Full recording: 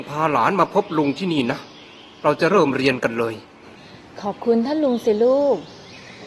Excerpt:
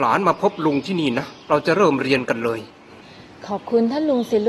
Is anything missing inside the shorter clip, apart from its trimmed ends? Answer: yes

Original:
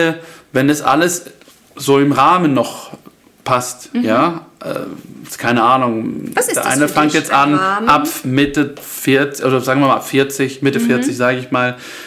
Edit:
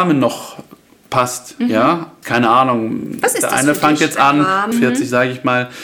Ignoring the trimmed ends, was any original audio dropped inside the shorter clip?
yes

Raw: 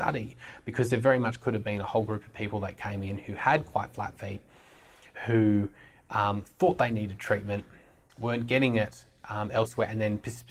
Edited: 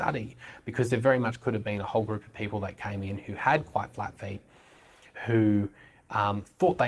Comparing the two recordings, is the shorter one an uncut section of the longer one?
yes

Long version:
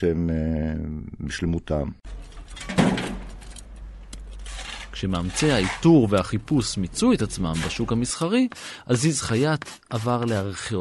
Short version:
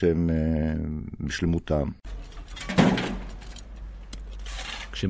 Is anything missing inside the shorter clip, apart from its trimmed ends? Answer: no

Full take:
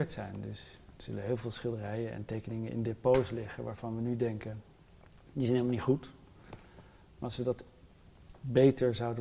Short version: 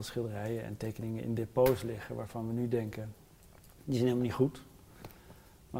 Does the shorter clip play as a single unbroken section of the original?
yes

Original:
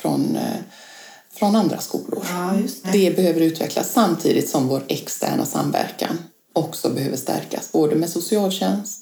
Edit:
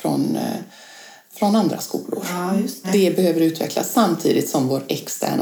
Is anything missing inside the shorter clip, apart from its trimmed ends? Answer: no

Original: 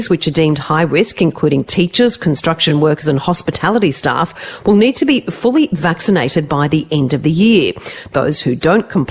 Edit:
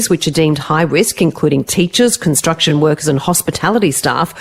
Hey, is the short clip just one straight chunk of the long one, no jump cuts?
yes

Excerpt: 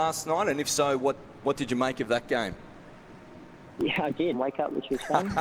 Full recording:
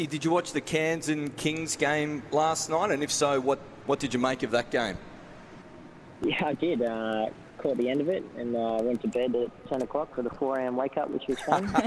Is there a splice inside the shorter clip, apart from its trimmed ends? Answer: yes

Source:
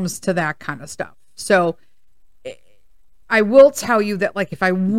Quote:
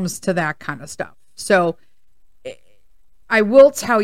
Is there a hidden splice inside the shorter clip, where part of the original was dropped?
no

